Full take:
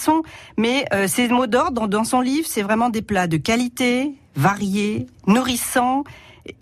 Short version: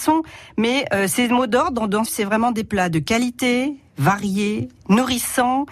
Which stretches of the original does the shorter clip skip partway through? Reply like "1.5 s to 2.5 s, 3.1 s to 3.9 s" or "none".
2.1 s to 2.4 s